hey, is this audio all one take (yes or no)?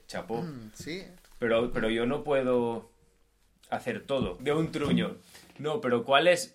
no